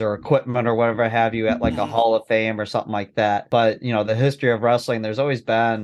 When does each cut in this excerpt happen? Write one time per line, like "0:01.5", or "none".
none